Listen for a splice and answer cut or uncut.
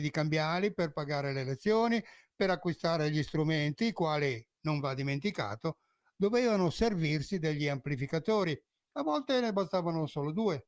uncut